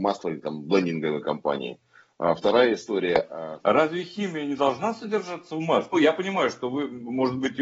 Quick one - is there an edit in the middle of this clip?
yes; 2 cuts; at 3.6 s, 5.9 s

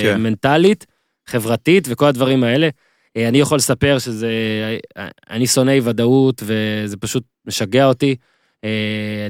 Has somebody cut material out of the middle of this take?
yes; 1 cut; at 1.1 s

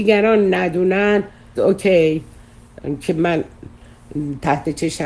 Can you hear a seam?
yes; 1 cut; at 1.6 s

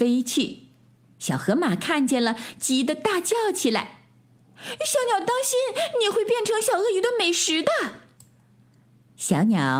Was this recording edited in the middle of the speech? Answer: no; 0 cuts

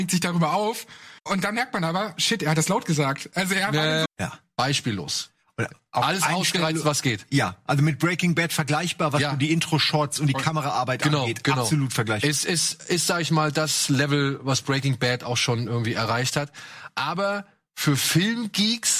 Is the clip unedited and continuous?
no; 2 cuts; at 1.2 s, 4.1 s

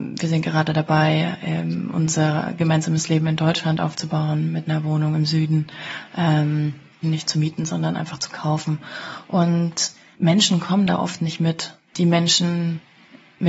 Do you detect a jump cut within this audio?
yes; 2 cuts; at 7.0 s, 11.9 s

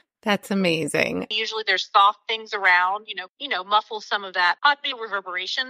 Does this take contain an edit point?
yes; 3 cuts; at 1.3 s, 3.3 s, 4.6 s

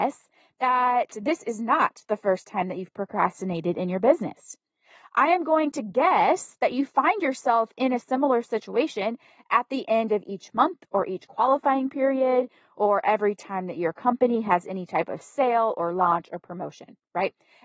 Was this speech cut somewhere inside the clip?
no; 0 cuts

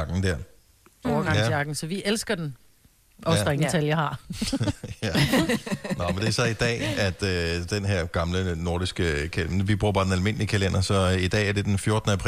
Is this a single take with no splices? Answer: no; 1 cut; at 1.0 s

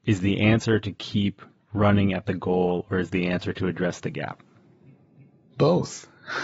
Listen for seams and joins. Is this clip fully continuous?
yes; 0 cuts

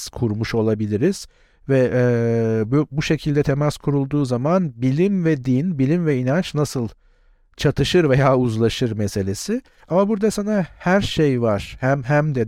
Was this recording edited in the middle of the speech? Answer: yes; 1 cut; at 9.8 s

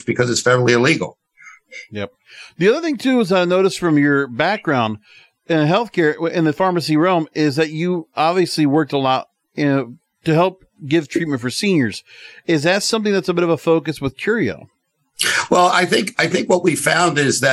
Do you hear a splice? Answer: no; 0 cuts

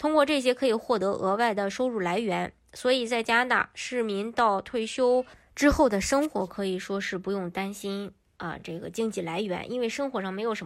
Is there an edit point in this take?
no; 0 cuts

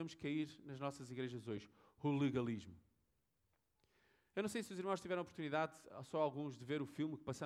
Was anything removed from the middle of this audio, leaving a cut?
no; 0 cuts

